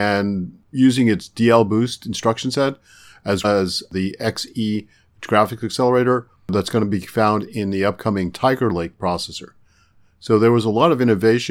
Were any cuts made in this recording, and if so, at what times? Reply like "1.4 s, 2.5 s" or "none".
3.4 s